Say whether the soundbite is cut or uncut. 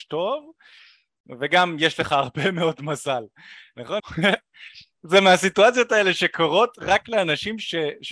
cut